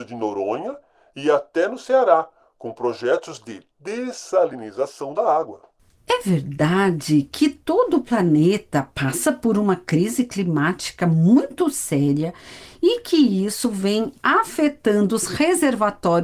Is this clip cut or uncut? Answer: uncut